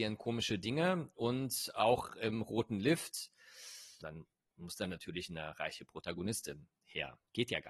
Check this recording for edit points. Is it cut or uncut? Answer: cut